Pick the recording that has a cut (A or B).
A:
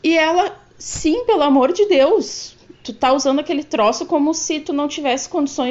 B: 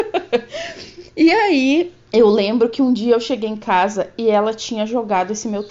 B